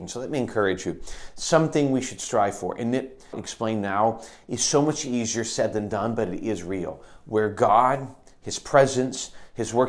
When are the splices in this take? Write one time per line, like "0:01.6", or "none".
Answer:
0:03.3